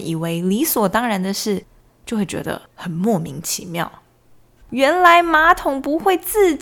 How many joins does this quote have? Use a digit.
2